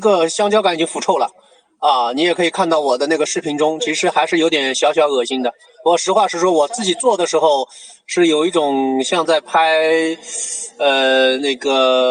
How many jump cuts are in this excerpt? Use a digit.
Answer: 0